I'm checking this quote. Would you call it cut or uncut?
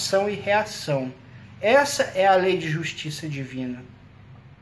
uncut